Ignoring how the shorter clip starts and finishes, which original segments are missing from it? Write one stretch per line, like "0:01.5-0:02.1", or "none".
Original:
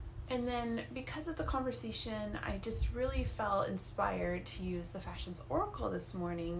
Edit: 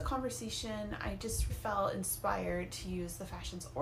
0:02.9-0:03.2